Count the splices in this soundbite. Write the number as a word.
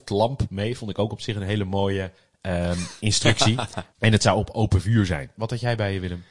two